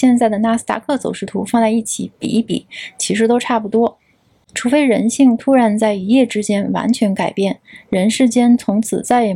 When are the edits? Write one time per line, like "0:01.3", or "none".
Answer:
none